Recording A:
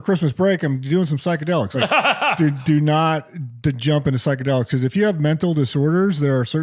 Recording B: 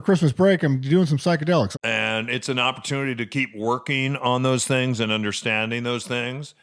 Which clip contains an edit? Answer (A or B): B